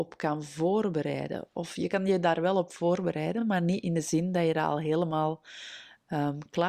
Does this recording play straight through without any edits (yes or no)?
yes